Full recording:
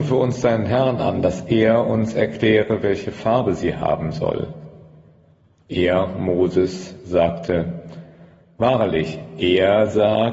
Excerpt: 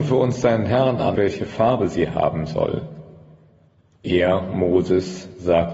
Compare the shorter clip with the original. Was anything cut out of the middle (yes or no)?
yes